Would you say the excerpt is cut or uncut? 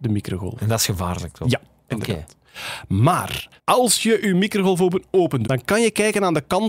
cut